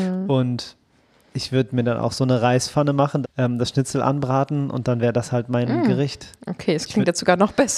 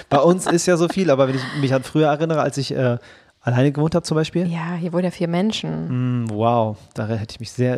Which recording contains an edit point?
first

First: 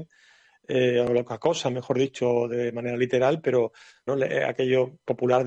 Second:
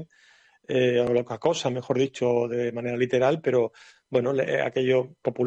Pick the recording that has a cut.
first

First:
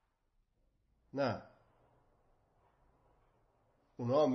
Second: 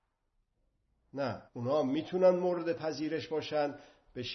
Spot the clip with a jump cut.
second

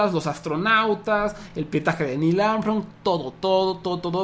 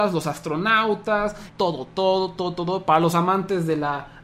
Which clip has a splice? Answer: second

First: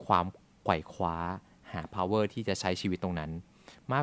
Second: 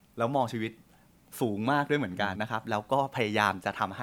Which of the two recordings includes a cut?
second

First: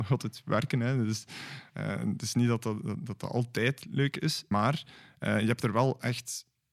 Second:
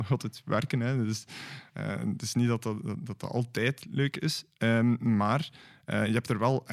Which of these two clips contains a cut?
first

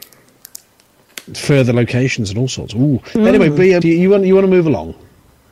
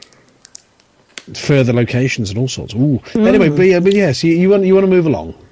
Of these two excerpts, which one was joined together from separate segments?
first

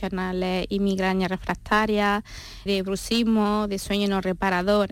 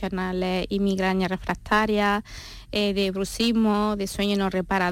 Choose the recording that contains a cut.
first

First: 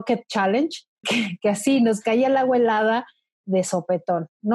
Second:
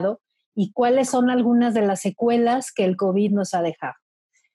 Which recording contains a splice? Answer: first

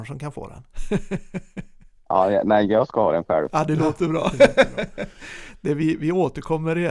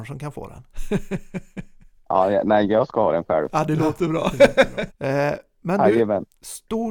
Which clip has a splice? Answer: second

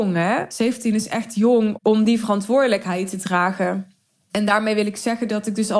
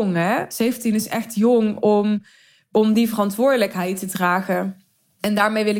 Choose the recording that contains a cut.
first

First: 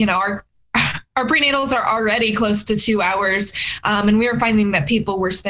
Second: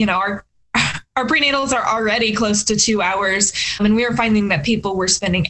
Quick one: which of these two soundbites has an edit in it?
second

